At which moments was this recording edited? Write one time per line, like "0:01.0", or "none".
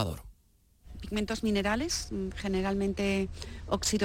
none